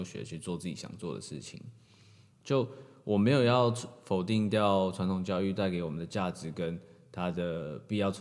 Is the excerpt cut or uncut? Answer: uncut